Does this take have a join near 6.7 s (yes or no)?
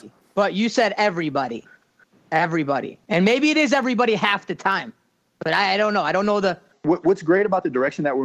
yes